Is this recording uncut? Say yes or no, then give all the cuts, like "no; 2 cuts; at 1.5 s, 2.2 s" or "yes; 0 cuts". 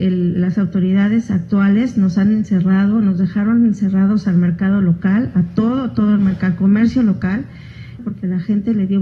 no; 1 cut; at 8.0 s